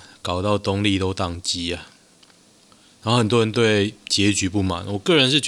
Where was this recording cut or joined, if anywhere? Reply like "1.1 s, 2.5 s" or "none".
none

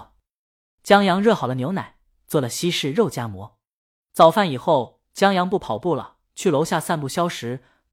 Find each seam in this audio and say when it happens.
none

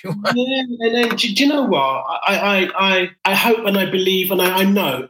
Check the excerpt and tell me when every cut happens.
3.2 s

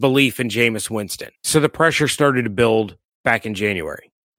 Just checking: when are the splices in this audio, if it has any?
1.3 s

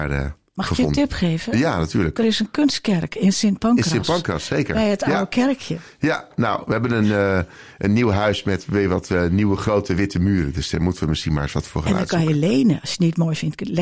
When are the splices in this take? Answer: none

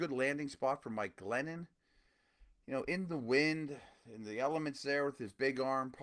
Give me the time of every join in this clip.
none

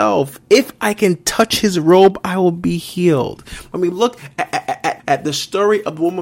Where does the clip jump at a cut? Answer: 5.0 s

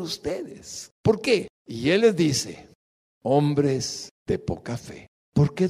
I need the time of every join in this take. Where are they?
1.5 s

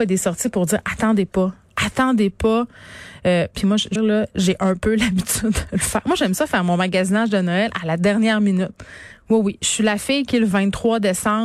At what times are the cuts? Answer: 4.0 s

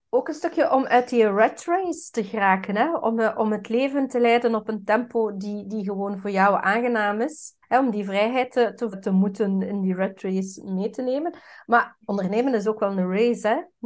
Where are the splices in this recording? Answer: 7.6 s, 8.9 s

